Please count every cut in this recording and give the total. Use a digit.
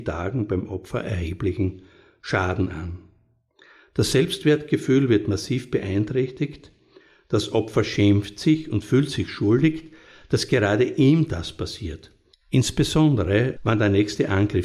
2